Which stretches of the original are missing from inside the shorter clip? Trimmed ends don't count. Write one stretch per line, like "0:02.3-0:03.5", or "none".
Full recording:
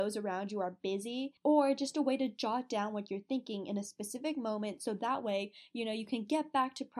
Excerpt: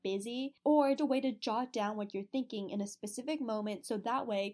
0:01.8-0:01.9